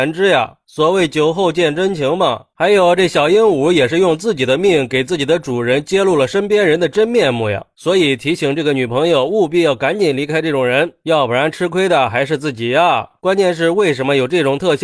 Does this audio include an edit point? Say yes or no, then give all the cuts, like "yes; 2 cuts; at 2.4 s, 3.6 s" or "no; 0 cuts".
no; 0 cuts